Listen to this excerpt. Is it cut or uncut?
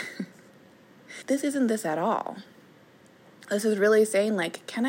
cut